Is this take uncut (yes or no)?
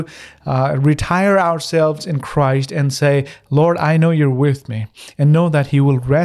yes